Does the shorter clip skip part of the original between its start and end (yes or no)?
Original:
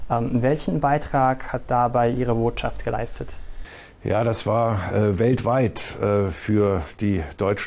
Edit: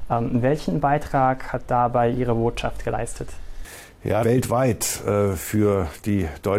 yes